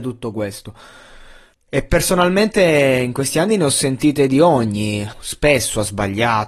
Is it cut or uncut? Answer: cut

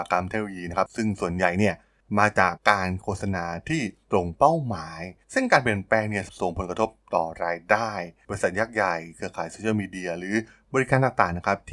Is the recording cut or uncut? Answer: cut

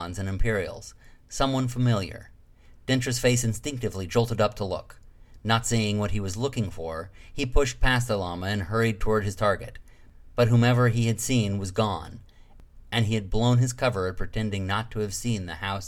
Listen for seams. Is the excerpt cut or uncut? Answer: uncut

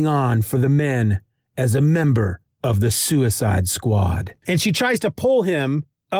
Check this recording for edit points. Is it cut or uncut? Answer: cut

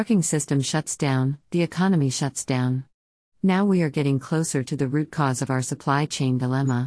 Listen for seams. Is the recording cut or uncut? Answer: cut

